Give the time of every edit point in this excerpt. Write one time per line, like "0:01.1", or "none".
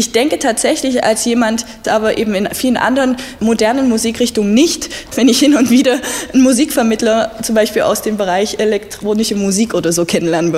0:01.8
0:05.1